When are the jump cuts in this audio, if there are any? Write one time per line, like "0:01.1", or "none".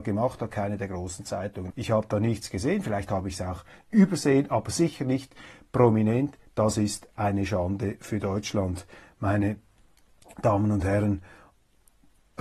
0:01.7